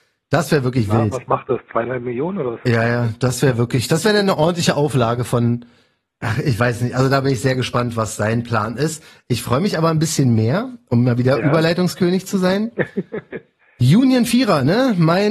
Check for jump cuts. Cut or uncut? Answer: uncut